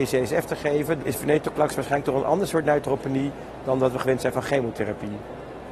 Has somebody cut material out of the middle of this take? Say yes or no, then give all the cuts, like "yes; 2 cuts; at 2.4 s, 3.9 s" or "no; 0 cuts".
yes; 1 cut; at 1.0 s